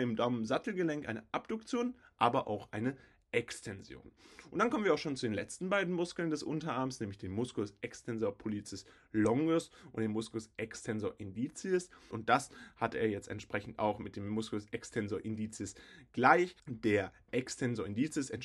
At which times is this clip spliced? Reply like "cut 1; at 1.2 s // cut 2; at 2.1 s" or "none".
cut 1; at 12.1 s // cut 2; at 16.6 s